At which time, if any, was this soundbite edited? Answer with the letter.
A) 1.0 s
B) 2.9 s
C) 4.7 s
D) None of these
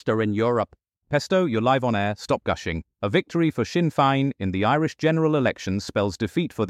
B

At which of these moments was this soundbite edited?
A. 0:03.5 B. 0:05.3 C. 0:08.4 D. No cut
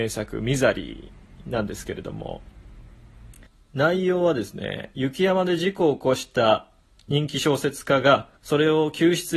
C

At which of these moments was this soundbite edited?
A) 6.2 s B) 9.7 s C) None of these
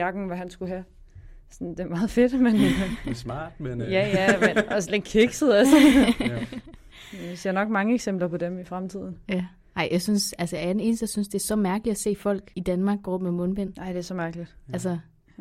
C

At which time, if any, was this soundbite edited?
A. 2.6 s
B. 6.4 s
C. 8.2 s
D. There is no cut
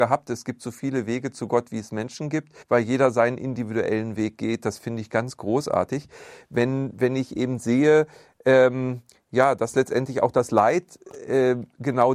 A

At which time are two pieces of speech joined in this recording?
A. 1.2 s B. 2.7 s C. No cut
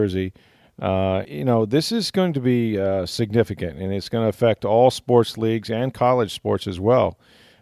A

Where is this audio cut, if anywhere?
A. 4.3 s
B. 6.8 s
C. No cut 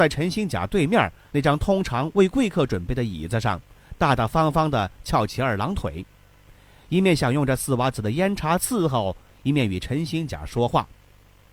C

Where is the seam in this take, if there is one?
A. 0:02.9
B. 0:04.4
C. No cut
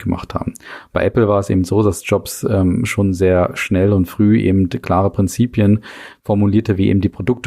C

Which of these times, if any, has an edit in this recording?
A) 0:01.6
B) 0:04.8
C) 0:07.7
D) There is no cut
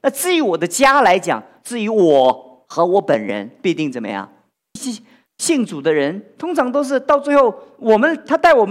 B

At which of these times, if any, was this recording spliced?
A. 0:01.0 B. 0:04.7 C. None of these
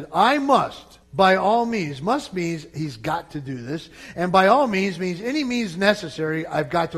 A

